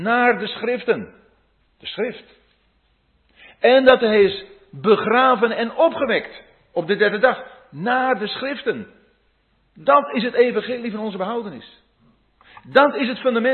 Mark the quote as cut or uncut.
uncut